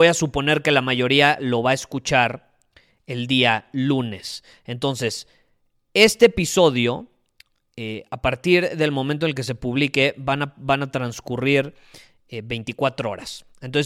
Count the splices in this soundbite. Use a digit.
0